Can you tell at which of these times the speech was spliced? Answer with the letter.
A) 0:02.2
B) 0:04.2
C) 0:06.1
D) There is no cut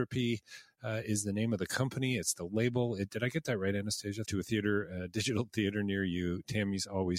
B